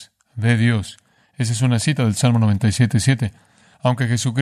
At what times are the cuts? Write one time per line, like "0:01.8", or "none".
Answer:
none